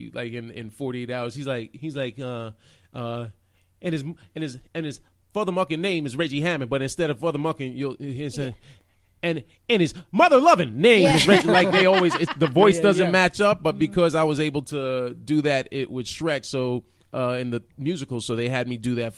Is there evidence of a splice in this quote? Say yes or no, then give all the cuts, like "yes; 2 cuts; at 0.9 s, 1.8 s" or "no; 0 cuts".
no; 0 cuts